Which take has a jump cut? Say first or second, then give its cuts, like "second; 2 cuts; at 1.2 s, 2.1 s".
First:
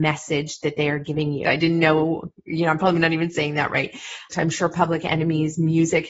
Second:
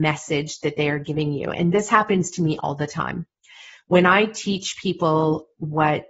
first; 2 cuts; at 1.4 s, 4.3 s